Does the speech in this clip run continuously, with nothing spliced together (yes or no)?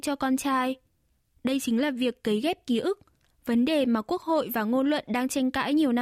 yes